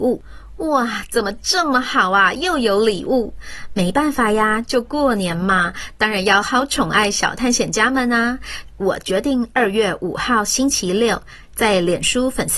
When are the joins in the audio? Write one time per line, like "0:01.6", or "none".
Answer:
0:06.4
0:08.7
0:11.4